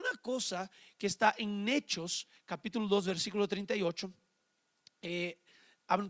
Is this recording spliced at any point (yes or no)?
no